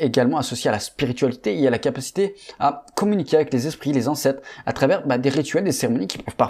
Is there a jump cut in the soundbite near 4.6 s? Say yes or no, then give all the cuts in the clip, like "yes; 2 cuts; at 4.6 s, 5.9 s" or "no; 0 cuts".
no; 0 cuts